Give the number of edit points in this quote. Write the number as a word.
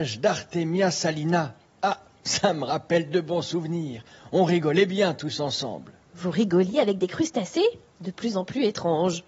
zero